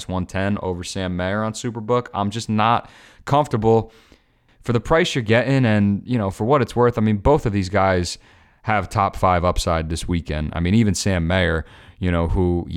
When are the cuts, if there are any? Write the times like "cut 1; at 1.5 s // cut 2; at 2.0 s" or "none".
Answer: none